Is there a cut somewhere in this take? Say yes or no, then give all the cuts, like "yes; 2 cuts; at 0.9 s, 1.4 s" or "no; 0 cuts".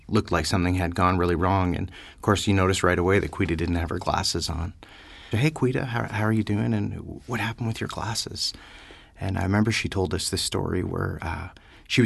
yes; 1 cut; at 5.3 s